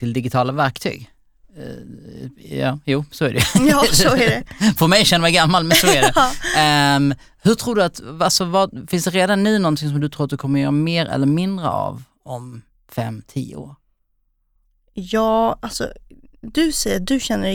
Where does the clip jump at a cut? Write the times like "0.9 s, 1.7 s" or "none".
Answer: none